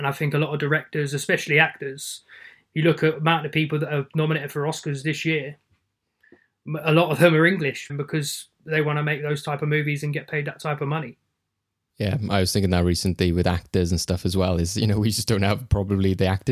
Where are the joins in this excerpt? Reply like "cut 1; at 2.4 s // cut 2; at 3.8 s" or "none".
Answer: cut 1; at 7.9 s